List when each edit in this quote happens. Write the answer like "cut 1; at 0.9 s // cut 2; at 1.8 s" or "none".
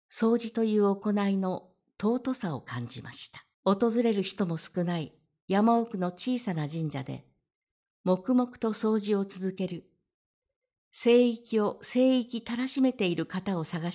cut 1; at 3.5 s